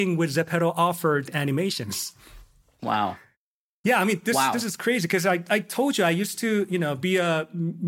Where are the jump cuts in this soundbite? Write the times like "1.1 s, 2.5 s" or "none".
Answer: none